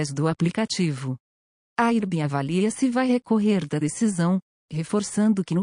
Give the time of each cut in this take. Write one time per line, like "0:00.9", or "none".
none